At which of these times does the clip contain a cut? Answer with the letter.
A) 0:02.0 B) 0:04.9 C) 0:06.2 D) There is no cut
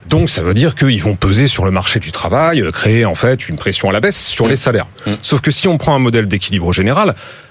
B